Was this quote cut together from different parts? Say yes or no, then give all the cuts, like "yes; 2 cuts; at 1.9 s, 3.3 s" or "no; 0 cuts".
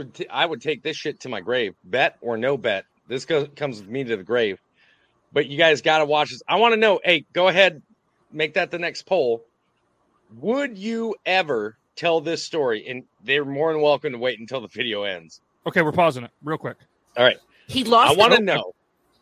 yes; 1 cut; at 15.6 s